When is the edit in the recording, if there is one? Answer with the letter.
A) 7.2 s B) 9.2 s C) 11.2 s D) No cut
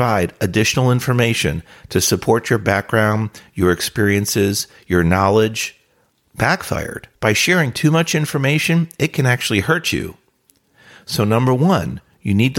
A